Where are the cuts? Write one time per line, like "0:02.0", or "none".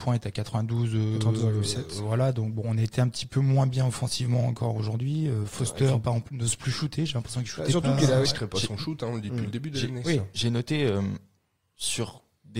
0:08.2